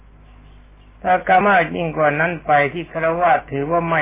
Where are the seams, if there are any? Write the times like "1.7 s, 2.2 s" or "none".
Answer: 1.4 s